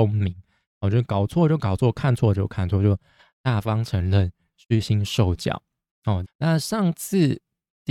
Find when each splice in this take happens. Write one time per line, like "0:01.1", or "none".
0:06.2